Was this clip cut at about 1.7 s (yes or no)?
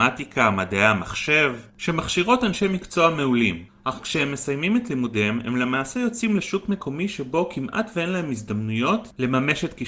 yes